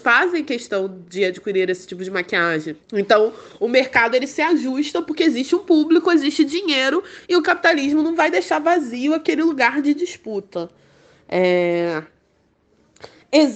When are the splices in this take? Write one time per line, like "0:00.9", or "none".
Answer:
0:02.8